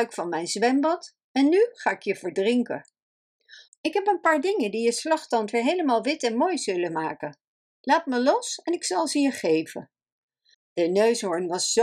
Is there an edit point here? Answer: yes; 2 cuts; at 3.7 s, 10.5 s

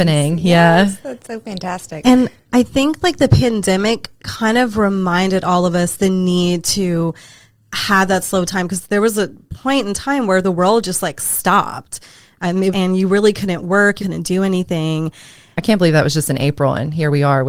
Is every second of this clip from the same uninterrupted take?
no; 3 cuts; at 12.7 s, 14.0 s, 15.6 s

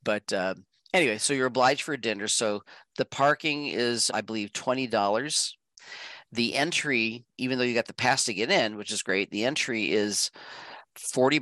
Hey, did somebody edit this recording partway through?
yes; 1 cut; at 4.1 s

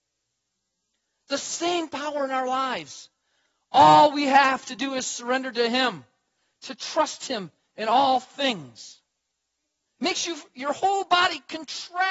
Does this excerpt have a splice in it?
yes; 1 cut; at 9.9 s

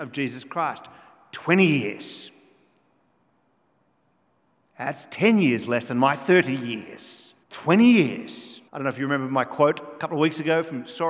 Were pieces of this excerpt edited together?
yes; 2 cuts; at 7.4 s, 8.7 s

